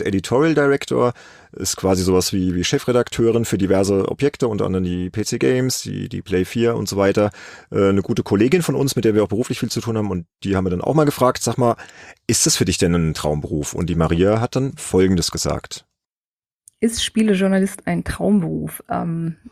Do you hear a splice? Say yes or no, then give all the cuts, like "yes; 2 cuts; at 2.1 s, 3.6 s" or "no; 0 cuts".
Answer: no; 0 cuts